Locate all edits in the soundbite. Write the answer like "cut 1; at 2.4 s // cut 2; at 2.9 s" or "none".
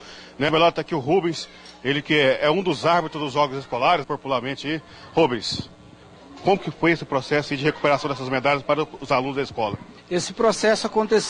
cut 1; at 4.0 s // cut 2; at 10.0 s